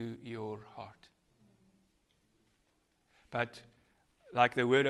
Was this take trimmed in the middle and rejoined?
no; 0 cuts

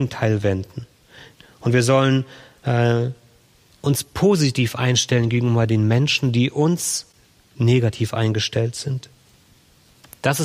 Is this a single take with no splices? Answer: yes; 0 cuts

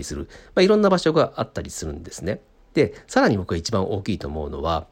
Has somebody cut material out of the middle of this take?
no; 0 cuts

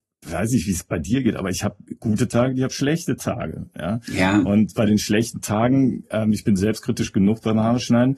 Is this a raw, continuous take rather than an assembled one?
yes; 0 cuts

